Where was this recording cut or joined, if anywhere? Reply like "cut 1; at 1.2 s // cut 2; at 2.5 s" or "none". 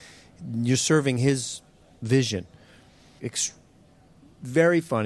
cut 1; at 3.2 s